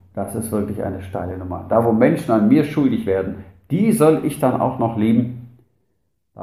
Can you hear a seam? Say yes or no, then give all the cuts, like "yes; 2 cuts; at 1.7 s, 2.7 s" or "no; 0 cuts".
no; 0 cuts